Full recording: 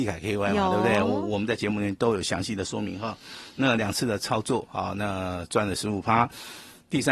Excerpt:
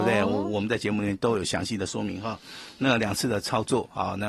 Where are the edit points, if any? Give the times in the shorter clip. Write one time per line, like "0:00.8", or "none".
none